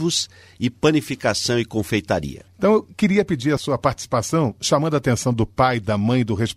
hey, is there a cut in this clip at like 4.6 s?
no; 1 cut; at 2.5 s

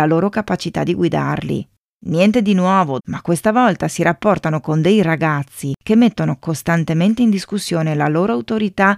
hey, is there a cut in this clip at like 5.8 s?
no; 2 cuts; at 1.9 s, 3.0 s

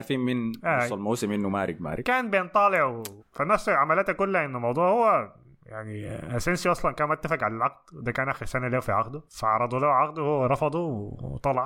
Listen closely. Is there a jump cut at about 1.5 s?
no; 2 cuts; at 3.2 s, 9.3 s

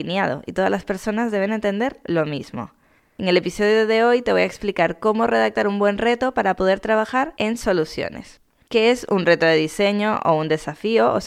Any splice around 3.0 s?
yes; 1 cut; at 3.0 s

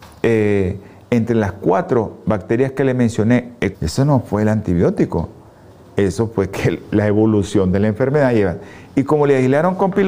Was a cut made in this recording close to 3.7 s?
yes; 1 cut; at 3.7 s

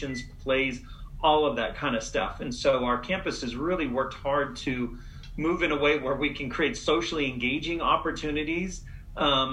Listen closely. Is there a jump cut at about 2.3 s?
no; 0 cuts

